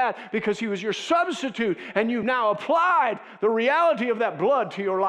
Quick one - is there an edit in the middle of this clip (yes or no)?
no